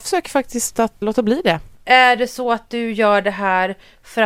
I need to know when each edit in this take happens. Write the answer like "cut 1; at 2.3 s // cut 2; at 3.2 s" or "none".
cut 1; at 1.0 s